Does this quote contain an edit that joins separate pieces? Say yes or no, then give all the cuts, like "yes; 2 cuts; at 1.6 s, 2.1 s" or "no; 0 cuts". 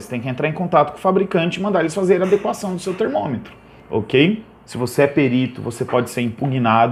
yes; 1 cut; at 4.7 s